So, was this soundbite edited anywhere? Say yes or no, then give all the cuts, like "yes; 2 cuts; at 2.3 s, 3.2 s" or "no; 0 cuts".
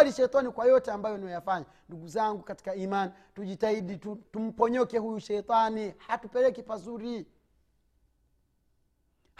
yes; 1 cut; at 4.2 s